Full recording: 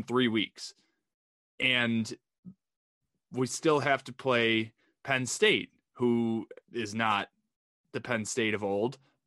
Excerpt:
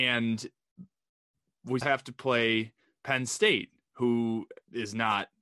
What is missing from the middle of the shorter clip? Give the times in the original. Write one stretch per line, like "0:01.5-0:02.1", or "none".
0:03.5-0:03.8